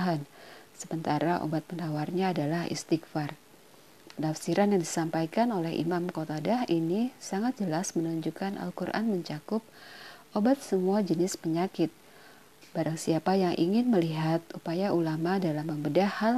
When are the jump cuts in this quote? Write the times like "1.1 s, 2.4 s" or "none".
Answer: 12.6 s

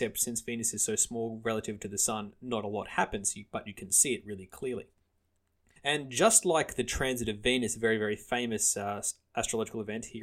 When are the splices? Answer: 5.8 s

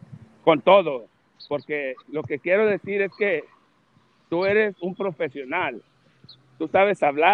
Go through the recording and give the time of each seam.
2.0 s

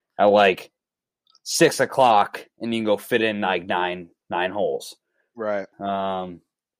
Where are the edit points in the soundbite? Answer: 5.7 s

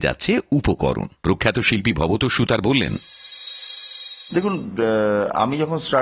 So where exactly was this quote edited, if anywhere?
1.2 s

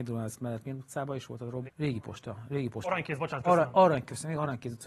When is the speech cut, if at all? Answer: 1.7 s

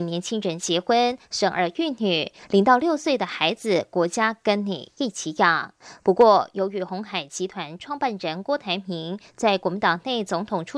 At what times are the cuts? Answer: none

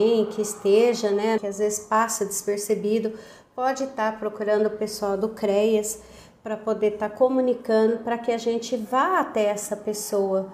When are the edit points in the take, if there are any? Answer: 1.4 s

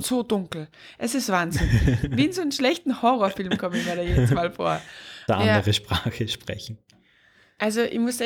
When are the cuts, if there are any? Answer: 5.3 s

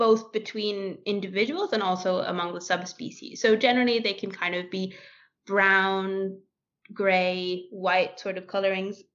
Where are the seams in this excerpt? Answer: none

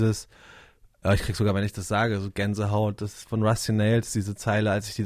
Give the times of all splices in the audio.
none

